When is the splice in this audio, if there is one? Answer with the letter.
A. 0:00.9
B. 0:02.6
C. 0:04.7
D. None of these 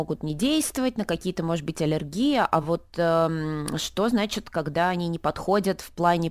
D